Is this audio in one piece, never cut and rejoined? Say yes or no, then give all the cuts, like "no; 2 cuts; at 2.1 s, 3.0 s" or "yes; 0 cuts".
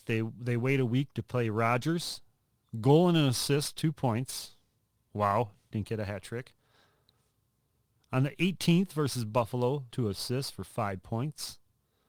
no; 1 cut; at 9.9 s